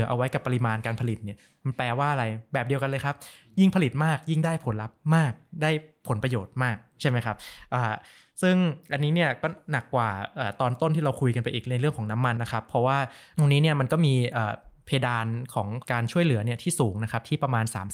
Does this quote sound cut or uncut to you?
cut